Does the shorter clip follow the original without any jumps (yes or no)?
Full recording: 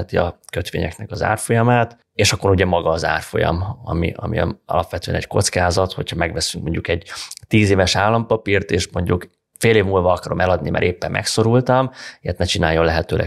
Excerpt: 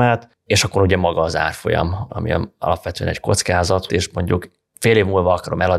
no